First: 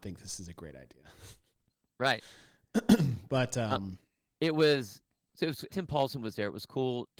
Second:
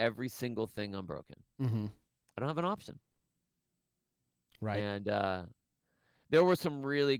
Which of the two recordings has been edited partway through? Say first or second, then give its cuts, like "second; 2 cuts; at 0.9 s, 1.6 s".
first; 1 cut; at 5.7 s